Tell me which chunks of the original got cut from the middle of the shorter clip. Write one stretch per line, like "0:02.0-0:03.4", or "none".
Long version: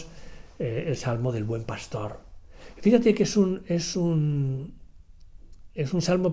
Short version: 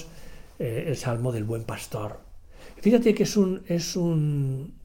none